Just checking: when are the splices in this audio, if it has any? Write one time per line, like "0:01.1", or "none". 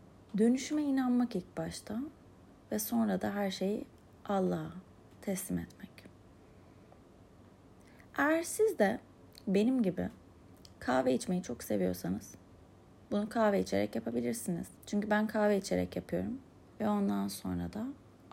0:14.8
0:16.7